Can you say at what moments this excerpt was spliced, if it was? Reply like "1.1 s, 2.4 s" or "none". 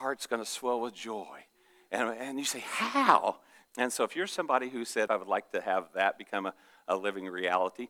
3.7 s, 5.1 s